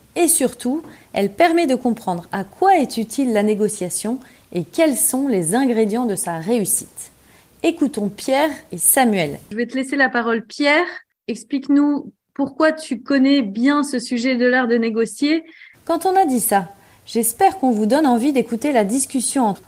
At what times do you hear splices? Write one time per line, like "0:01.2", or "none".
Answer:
0:09.4
0:15.7